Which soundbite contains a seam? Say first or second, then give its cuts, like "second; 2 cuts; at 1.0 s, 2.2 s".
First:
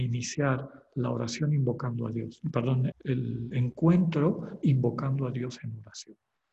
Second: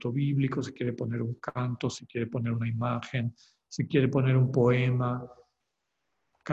first; 1 cut; at 2.9 s